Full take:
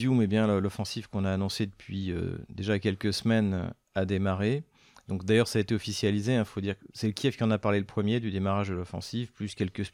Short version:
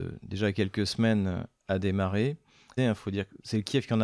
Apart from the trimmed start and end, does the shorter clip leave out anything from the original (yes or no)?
yes